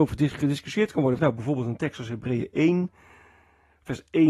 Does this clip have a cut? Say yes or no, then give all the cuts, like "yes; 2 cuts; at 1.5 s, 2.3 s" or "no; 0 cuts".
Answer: yes; 1 cut; at 1.2 s